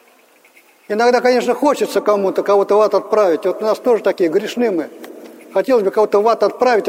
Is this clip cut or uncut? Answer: uncut